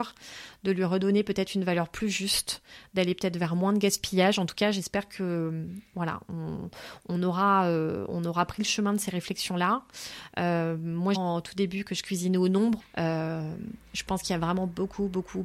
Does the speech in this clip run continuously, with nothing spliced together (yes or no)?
no